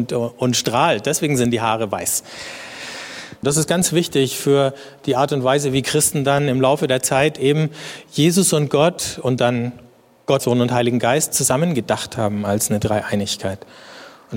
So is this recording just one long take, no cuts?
no; 2 cuts; at 3.4 s, 10.4 s

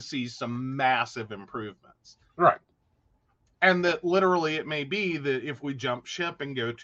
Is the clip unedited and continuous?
yes; 0 cuts

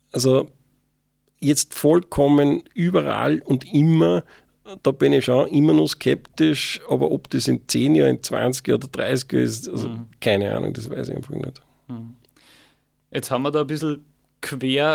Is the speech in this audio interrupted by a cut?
no; 0 cuts

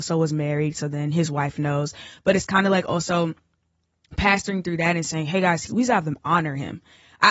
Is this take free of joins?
no; 1 cut; at 5.7 s

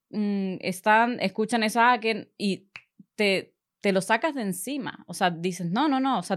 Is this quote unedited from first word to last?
yes; 0 cuts

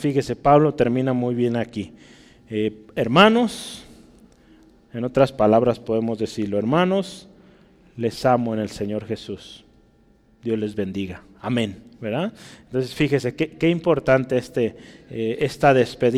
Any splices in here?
no; 0 cuts

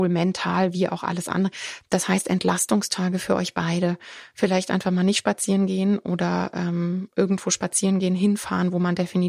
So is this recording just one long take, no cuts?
no; 1 cut; at 1.8 s

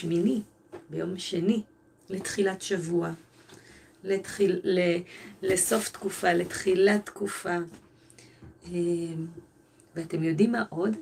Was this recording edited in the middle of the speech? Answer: yes; 1 cut; at 2.0 s

